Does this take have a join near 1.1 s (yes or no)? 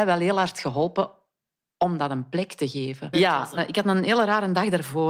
no